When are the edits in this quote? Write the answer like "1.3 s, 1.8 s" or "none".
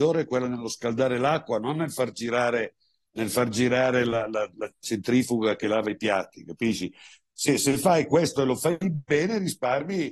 none

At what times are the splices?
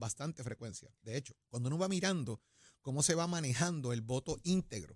1.4 s

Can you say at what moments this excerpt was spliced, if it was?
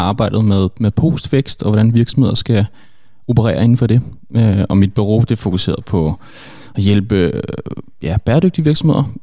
none

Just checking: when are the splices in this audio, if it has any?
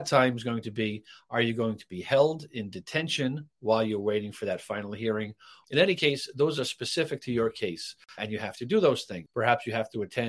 5.6 s, 8.2 s, 9.3 s

